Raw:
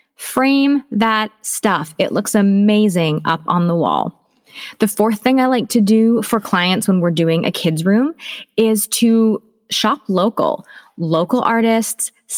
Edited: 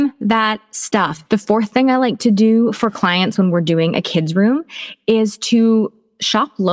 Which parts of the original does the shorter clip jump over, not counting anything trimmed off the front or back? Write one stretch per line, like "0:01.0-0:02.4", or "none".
0:02.0-0:04.8